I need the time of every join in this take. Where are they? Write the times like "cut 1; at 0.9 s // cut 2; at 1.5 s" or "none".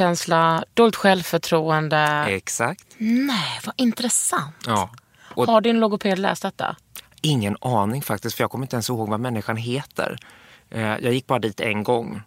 none